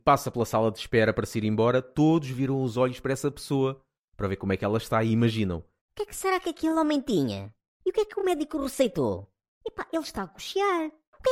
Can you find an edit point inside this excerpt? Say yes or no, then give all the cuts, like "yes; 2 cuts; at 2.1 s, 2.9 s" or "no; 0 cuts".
no; 0 cuts